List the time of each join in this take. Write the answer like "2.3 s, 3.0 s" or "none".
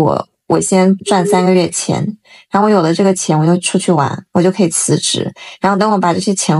1.0 s